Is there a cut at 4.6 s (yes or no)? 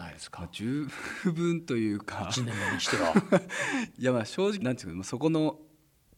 yes